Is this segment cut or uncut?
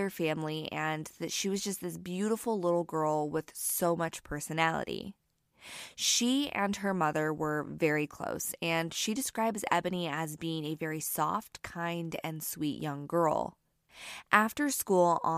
uncut